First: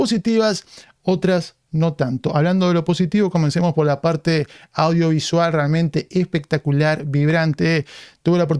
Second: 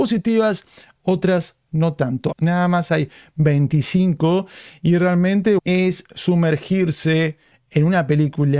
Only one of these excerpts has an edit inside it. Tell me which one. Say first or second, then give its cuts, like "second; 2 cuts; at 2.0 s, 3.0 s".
second; 2 cuts; at 2.3 s, 5.6 s